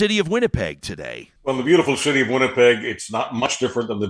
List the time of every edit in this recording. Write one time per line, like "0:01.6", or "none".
0:01.4